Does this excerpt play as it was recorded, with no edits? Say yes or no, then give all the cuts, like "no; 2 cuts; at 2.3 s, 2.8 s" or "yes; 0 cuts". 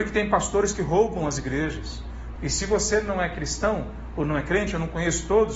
no; 1 cut; at 2.4 s